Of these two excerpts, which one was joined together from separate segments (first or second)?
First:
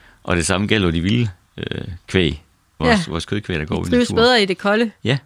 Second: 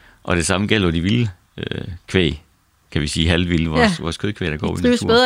first